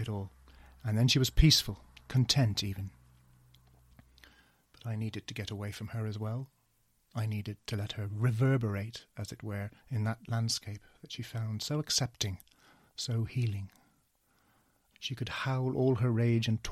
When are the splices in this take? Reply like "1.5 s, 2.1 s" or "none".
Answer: 9.8 s, 14.9 s